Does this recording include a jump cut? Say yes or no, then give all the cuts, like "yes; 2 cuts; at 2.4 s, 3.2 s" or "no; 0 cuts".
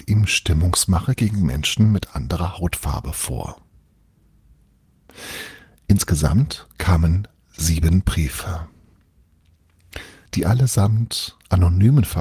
yes; 1 cut; at 10.3 s